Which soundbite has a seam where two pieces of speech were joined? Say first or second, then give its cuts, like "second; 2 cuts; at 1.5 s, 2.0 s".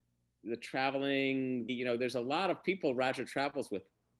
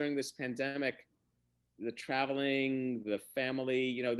first; 1 cut; at 1.7 s